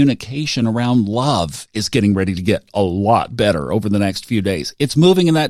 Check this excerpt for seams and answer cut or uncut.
uncut